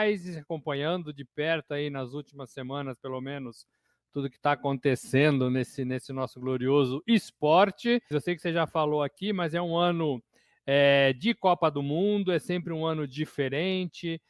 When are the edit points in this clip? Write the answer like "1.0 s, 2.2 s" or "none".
8.1 s

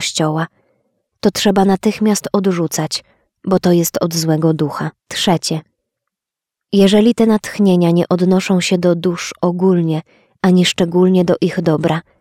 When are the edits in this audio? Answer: 5.0 s

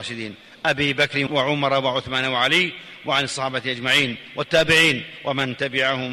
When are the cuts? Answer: 1.3 s

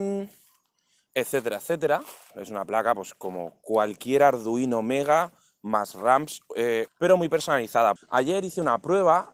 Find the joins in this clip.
2.3 s, 6.9 s, 8.0 s

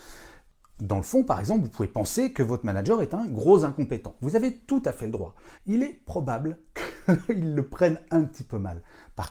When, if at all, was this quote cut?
5.6 s

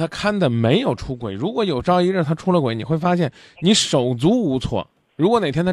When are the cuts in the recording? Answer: none

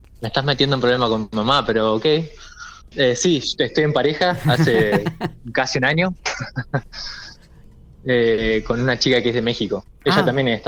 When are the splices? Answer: 2.9 s

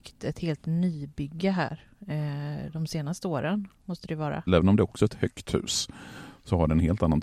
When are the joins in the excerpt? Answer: 4.5 s

